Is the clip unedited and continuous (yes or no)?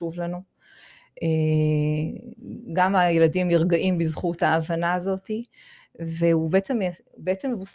yes